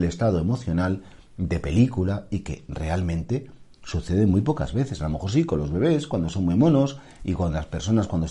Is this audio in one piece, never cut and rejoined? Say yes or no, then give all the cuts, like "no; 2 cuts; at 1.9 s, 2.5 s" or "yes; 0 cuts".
yes; 0 cuts